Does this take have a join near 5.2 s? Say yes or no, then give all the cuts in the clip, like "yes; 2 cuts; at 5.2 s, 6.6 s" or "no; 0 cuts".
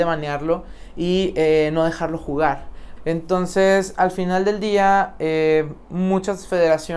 no; 1 cut; at 3.0 s